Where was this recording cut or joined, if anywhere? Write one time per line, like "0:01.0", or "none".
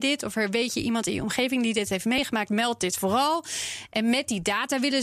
none

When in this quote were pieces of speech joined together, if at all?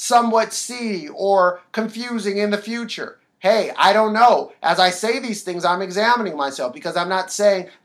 none

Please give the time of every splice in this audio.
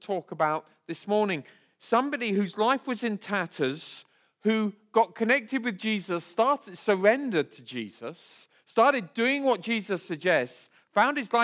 none

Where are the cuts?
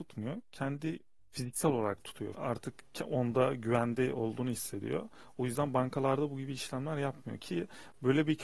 0:02.3

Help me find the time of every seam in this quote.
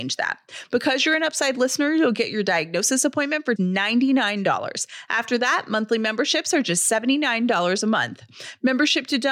0:03.6

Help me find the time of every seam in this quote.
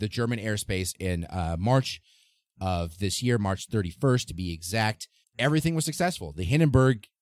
0:05.2

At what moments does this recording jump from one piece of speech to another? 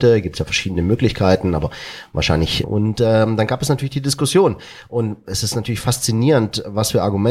0:02.6

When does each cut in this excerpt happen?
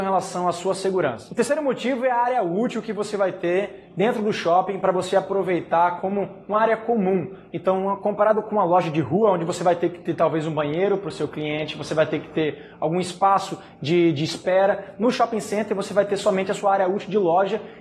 none

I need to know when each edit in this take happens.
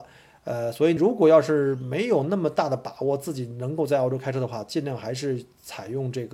0:01.0

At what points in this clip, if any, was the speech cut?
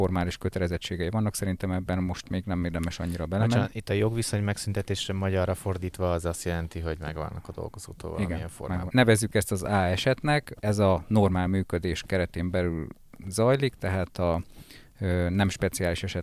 0:08.9

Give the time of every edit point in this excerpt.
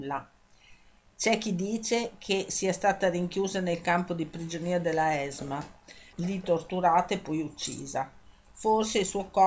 0:06.1

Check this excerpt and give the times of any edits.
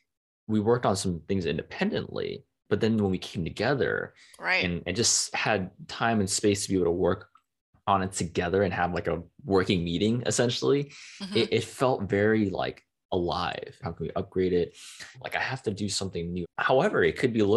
0:13.8
0:15.1
0:16.4

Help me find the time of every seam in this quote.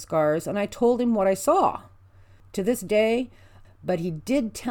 0:03.6

